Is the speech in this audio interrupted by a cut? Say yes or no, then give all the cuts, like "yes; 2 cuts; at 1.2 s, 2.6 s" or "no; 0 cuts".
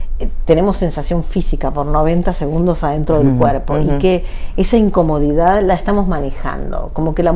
no; 0 cuts